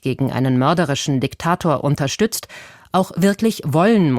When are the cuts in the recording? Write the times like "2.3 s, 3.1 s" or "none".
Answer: none